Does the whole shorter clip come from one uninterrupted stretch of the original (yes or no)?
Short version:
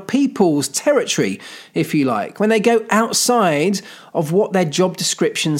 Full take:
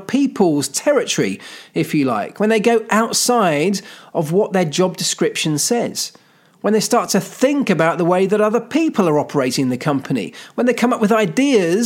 yes